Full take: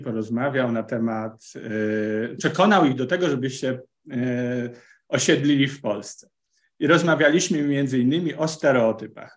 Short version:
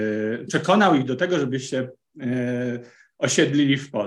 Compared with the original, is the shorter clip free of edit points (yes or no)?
yes